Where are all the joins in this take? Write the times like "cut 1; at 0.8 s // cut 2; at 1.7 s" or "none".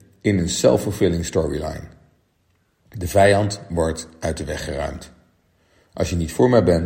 cut 1; at 2.8 s